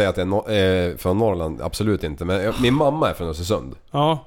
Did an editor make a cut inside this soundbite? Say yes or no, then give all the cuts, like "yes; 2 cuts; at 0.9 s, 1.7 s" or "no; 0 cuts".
no; 0 cuts